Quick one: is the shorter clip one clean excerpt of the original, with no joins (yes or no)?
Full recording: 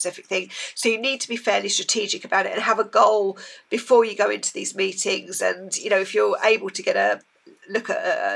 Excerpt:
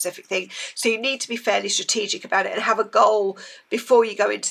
yes